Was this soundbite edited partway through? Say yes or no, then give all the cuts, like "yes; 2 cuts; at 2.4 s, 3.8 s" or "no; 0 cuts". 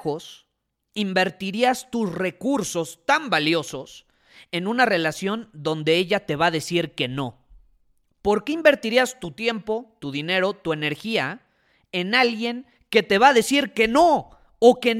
no; 0 cuts